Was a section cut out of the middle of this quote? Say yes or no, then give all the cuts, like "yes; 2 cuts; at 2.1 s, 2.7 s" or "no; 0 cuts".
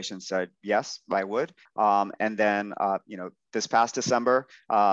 yes; 1 cut; at 1.7 s